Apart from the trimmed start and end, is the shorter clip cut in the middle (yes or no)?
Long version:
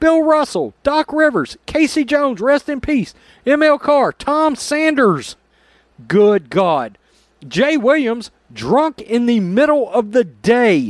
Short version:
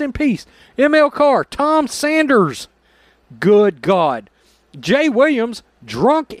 no